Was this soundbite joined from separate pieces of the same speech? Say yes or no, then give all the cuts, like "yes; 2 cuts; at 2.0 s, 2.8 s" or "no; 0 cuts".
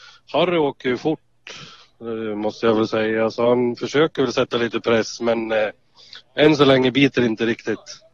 no; 0 cuts